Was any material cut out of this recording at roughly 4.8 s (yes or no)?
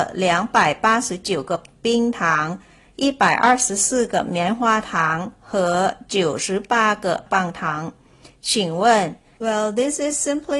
no